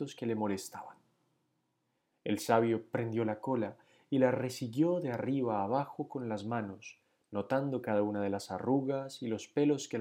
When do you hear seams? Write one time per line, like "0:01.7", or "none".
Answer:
none